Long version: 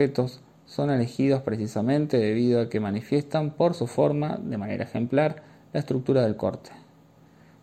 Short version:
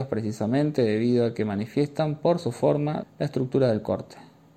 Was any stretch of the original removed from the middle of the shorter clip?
yes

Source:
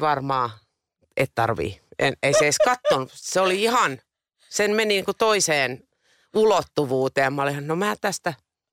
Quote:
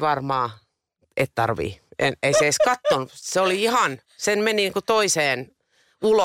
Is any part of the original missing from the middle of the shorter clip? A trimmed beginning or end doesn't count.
yes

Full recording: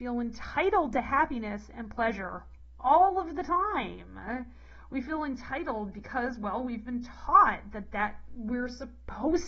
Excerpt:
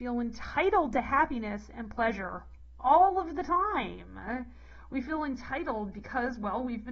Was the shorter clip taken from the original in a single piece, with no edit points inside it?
yes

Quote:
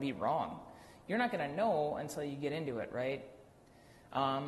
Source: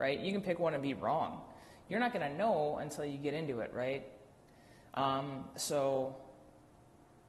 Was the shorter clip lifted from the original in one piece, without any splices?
yes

